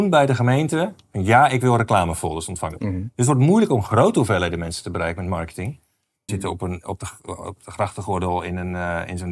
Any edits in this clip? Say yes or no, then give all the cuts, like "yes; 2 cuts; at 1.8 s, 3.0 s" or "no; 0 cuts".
yes; 2 cuts; at 2.8 s, 6.3 s